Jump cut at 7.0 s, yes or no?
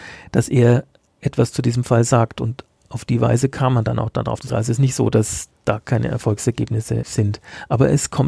yes